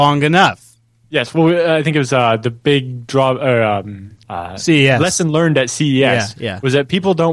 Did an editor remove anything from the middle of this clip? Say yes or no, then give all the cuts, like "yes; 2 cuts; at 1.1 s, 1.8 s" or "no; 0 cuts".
yes; 1 cut; at 4.2 s